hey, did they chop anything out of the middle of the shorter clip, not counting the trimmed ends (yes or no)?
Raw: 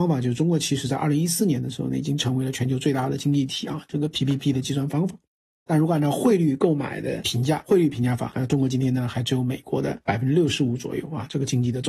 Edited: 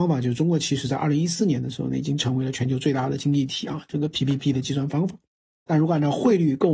no